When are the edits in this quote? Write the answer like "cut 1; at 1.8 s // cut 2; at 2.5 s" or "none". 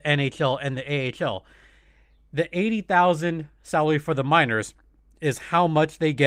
none